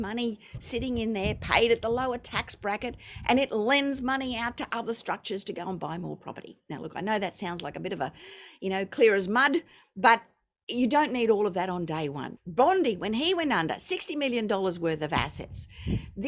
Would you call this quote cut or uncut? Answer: cut